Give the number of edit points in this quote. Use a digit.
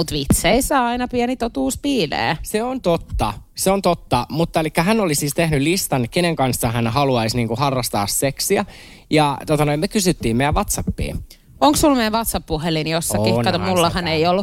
0